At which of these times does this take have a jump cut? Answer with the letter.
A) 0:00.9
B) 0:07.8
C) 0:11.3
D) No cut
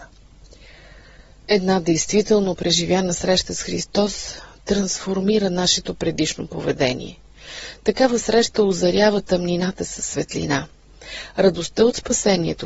D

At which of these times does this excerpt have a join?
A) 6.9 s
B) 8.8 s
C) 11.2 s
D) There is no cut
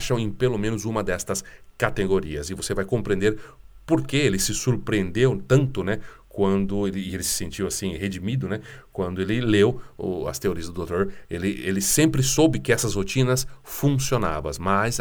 C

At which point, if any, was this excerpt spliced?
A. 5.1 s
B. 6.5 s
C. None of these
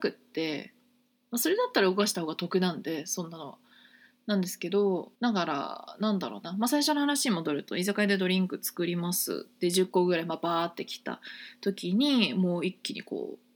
A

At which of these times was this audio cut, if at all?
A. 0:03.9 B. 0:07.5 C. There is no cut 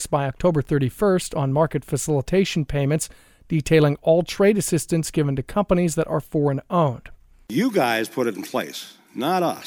B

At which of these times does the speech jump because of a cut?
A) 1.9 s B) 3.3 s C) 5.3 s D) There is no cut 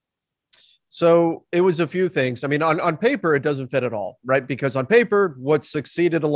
D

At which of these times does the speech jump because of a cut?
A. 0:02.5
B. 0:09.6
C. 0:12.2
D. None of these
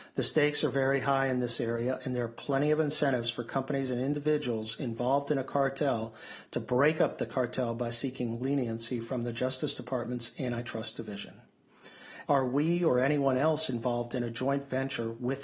C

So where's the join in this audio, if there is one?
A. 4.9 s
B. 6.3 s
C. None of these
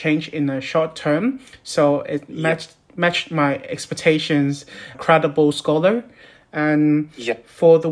A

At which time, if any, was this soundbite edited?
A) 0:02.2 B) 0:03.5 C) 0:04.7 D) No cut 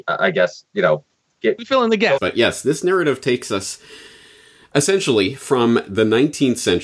A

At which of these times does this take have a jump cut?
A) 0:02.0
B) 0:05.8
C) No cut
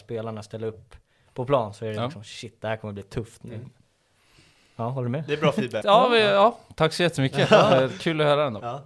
B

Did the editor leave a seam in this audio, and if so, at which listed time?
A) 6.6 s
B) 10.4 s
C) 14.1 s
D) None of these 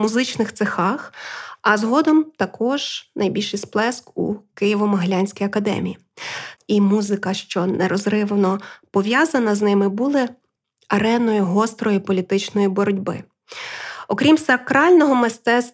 A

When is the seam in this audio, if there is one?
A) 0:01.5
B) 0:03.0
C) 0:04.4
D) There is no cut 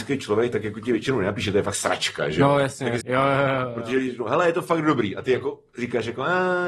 B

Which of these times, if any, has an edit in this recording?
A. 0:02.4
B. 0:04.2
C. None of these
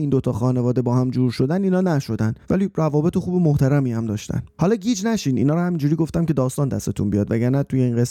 A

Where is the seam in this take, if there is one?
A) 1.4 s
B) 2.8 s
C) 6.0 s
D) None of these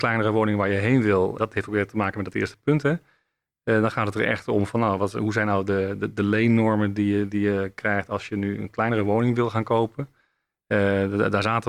A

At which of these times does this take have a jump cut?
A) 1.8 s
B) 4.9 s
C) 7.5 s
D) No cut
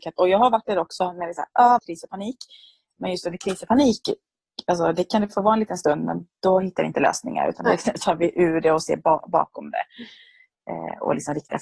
A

